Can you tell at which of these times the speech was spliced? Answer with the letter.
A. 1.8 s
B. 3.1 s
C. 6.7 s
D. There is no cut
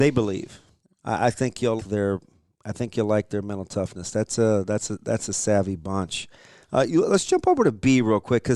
A